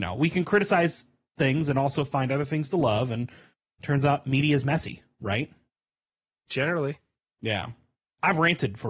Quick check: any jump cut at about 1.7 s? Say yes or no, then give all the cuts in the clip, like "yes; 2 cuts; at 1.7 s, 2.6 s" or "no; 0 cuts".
no; 0 cuts